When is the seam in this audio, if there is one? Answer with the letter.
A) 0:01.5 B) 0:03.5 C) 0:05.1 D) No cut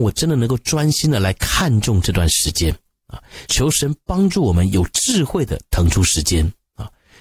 B